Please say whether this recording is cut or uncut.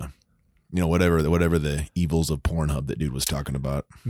uncut